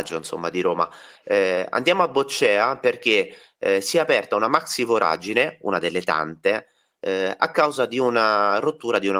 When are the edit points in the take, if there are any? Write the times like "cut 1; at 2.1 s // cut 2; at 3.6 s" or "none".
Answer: cut 1; at 1.2 s